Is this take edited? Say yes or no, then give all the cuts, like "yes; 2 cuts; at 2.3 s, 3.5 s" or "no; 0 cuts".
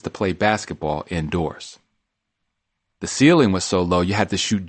yes; 1 cut; at 2.9 s